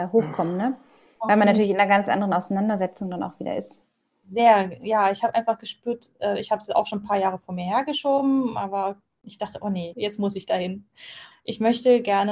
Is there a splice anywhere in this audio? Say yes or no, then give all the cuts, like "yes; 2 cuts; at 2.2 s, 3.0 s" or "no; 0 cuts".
yes; 2 cuts; at 9.9 s, 11.3 s